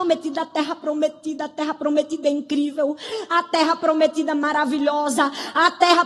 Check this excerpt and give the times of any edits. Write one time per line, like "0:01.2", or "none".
none